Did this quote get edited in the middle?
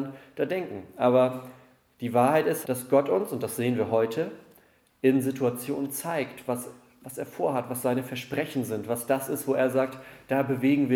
yes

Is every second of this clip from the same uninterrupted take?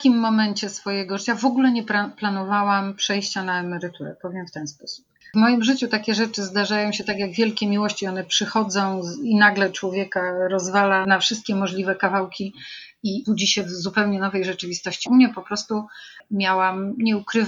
no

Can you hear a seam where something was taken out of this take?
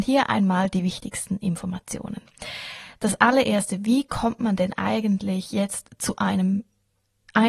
no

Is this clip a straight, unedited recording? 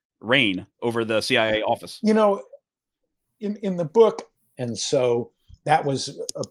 no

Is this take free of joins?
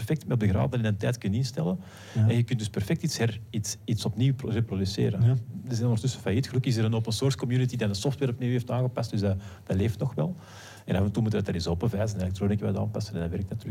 yes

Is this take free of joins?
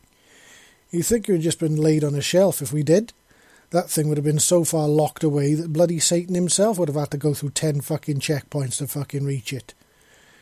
yes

